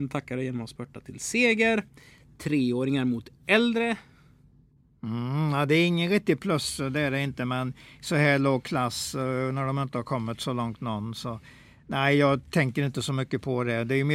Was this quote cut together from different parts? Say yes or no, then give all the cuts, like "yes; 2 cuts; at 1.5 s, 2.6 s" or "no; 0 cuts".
no; 0 cuts